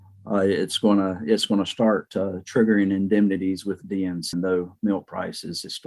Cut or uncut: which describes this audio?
cut